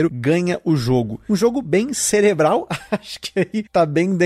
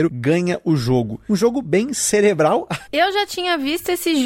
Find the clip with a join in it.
second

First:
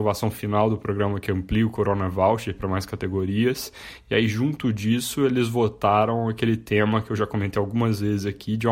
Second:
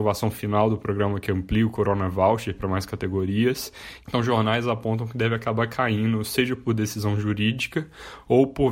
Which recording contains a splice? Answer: second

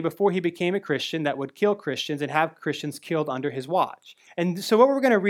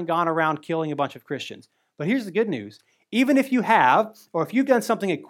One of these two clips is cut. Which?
first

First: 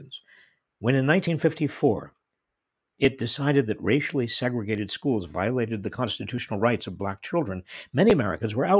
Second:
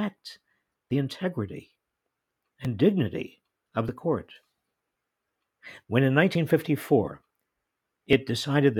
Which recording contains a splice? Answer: second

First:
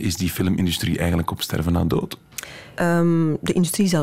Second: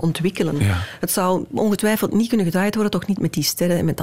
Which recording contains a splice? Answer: first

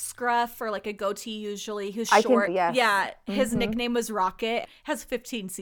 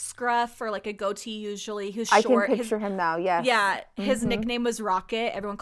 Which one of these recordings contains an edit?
first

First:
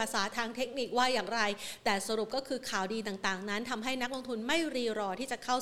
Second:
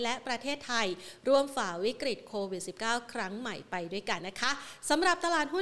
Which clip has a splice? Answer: second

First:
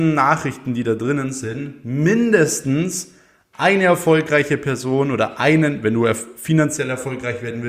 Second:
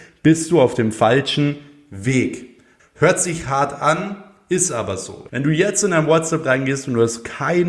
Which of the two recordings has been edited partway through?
second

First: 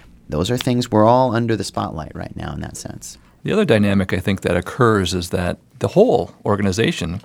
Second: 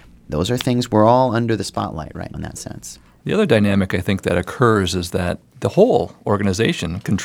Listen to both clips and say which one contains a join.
second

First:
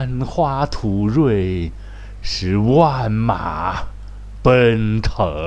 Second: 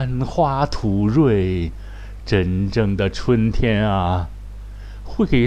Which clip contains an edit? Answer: second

